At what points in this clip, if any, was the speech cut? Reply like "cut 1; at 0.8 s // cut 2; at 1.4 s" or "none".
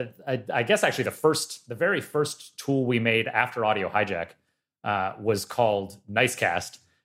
none